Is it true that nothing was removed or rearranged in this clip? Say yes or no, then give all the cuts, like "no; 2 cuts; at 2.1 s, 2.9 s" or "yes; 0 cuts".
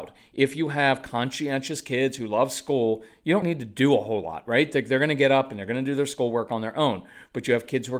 no; 1 cut; at 3.4 s